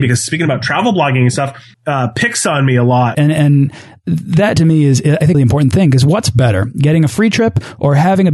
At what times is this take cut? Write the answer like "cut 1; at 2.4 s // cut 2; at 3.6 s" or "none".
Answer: cut 1; at 1.7 s // cut 2; at 3.1 s // cut 3; at 5.3 s